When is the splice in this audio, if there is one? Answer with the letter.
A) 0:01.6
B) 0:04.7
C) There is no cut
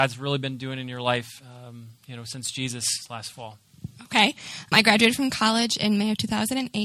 B